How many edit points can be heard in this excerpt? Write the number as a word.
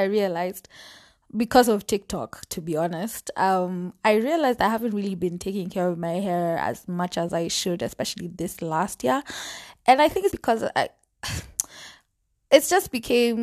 one